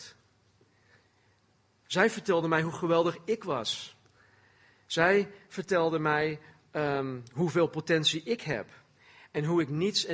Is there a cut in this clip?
no; 0 cuts

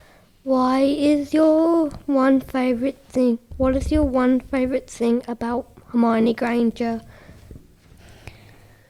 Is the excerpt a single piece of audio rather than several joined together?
yes; 0 cuts

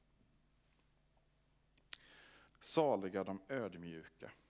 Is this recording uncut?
no; 1 cut; at 2.5 s

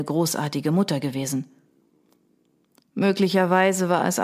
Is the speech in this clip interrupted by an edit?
no; 0 cuts

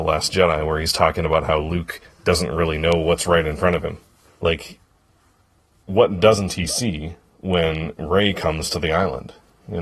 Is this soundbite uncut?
no; 1 cut; at 4.3 s

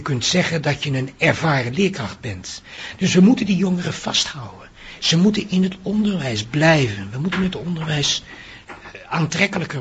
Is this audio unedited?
yes; 0 cuts

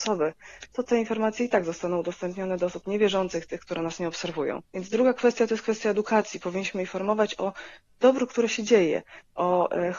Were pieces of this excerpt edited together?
yes; 1 cut; at 4.6 s

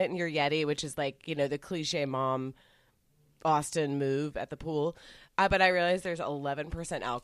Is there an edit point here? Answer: no; 0 cuts

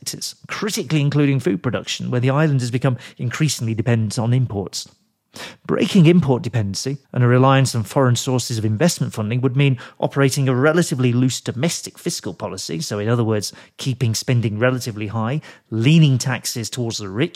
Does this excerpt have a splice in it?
yes; 1 cut; at 7.0 s

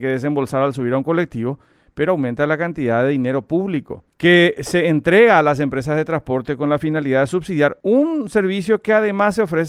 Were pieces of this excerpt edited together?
no; 0 cuts

